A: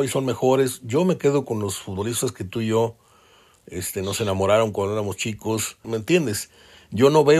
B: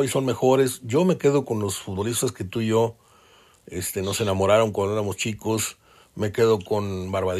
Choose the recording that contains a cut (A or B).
A